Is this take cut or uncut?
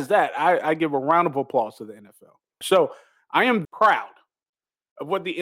cut